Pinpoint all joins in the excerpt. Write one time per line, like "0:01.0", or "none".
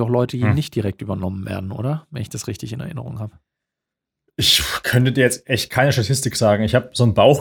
none

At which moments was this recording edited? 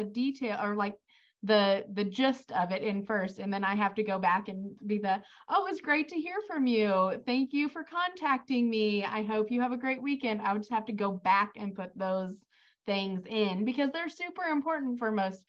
none

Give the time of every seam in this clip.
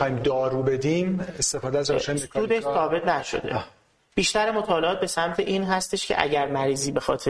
none

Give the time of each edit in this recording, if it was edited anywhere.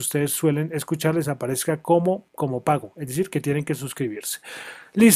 0:02.3

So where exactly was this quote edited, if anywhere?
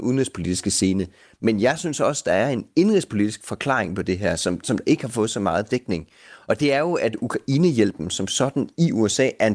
none

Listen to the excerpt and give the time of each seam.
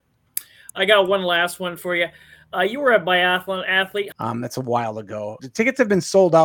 0:04.1
0:05.4

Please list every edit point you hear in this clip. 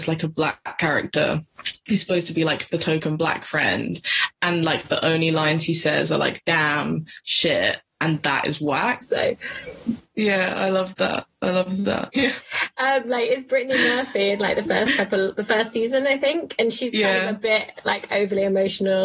0:09.0
0:12.1

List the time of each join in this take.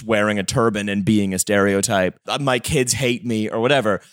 0:02.2

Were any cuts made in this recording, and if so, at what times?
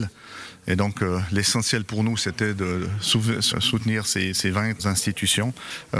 0:03.5
0:04.8

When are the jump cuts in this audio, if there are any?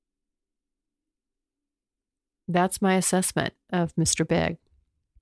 none

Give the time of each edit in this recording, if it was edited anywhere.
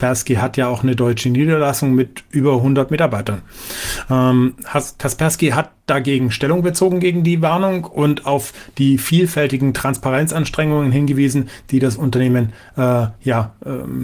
none

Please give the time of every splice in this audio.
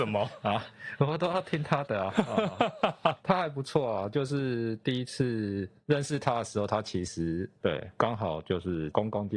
0:07.6

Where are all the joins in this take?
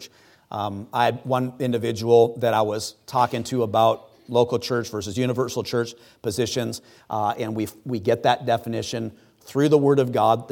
0:07.0

